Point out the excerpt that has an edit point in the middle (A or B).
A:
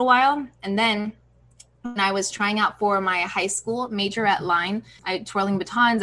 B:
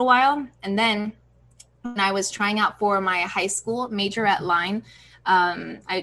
A